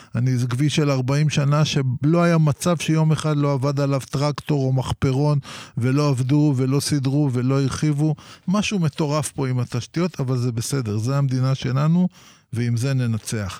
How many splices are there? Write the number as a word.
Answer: zero